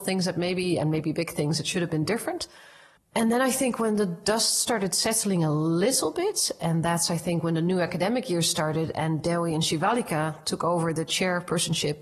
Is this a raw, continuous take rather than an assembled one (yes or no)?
no